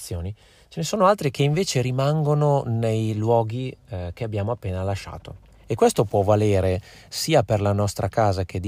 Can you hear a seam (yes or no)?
no